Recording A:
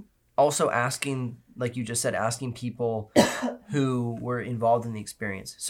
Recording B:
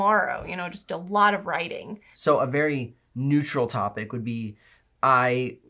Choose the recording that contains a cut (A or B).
B